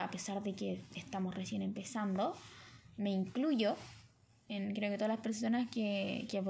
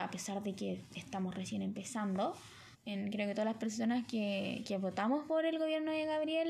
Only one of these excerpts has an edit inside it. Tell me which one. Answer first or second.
second